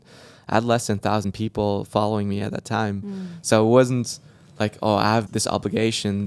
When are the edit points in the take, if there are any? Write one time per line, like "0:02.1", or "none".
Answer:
0:05.3